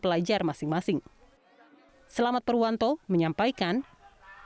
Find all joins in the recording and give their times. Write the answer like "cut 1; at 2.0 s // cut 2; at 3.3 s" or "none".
cut 1; at 3.0 s